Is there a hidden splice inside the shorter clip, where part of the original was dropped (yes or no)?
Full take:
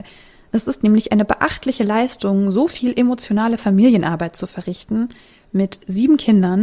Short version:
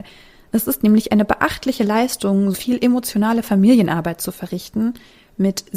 yes